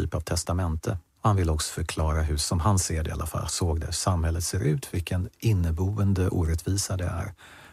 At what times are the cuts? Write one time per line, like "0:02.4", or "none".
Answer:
0:01.2